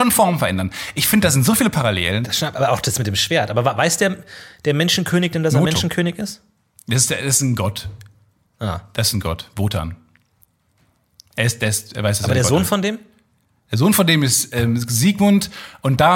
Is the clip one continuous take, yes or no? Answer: yes